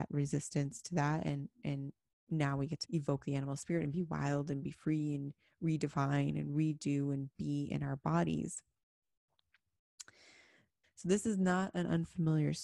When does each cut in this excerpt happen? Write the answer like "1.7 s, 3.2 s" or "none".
2.8 s, 10.8 s